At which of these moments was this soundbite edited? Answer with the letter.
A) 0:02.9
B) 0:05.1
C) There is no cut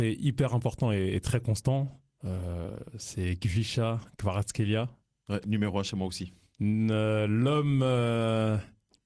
C